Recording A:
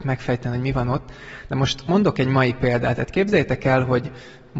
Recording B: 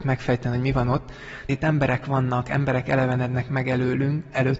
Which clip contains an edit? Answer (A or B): B